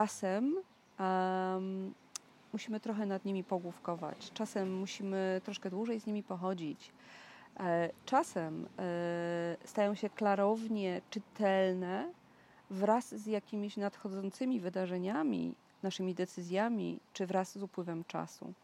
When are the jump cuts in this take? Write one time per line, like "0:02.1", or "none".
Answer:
none